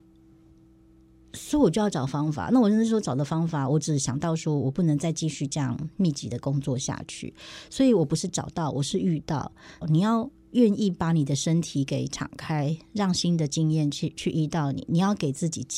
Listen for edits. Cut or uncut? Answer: cut